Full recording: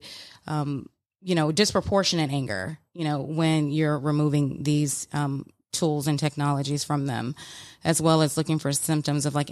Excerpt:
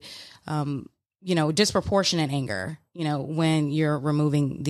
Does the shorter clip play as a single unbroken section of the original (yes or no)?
yes